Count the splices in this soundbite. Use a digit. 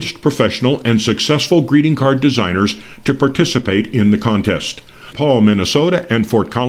1